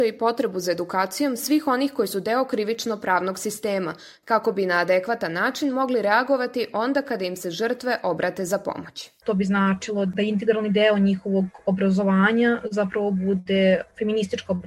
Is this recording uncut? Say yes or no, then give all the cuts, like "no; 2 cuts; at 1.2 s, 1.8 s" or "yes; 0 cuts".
no; 1 cut; at 4.2 s